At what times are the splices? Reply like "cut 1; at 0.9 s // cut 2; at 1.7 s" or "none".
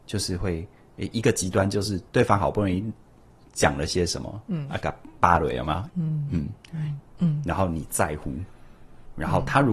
cut 1; at 2.1 s // cut 2; at 5.9 s // cut 3; at 7.0 s

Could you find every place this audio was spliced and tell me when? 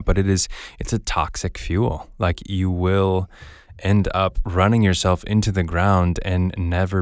none

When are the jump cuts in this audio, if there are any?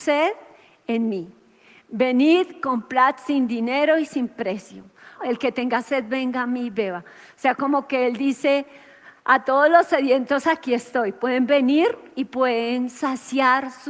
cut 1; at 5.2 s

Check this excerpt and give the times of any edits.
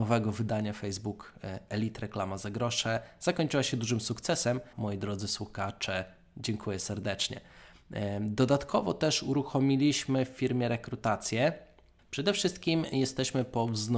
cut 1; at 4.7 s // cut 2; at 12.0 s

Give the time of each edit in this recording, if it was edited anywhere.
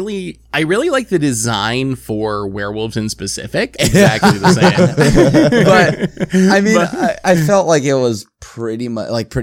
cut 1; at 3.8 s

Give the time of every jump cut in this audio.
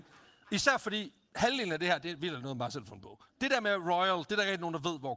cut 1; at 3.3 s

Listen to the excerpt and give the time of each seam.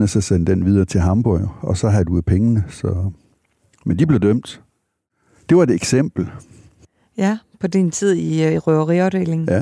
none

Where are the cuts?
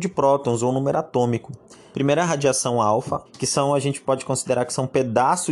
cut 1; at 1.9 s // cut 2; at 3.3 s

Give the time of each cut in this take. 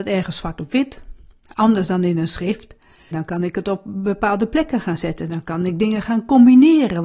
cut 1; at 3.1 s

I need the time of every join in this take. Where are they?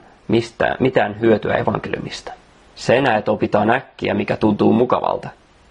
cut 1; at 2.7 s

